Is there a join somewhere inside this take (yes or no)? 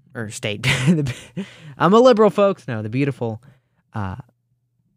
no